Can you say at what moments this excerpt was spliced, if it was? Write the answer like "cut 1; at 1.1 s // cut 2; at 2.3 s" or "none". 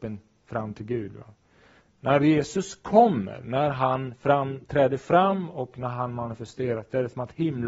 none